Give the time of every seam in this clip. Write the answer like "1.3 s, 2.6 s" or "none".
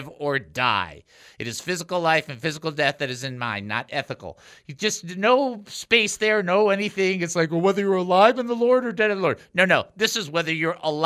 none

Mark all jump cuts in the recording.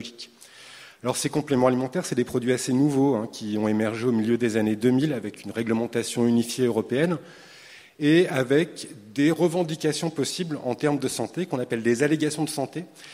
1.0 s

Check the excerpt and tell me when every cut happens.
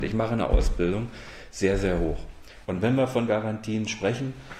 2.7 s

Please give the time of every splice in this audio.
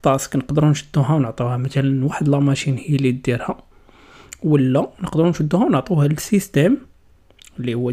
none

